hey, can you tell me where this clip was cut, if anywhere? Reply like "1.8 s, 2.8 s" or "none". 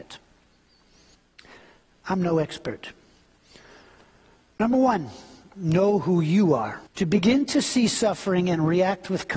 6.9 s